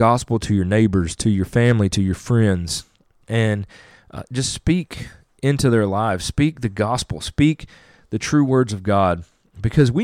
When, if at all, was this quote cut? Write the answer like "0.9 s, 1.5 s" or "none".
none